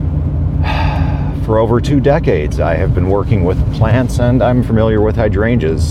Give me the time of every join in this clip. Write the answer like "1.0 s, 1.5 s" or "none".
4.6 s